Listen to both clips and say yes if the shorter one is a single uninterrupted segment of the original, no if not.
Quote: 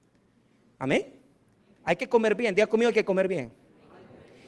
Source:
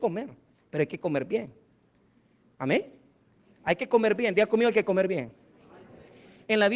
yes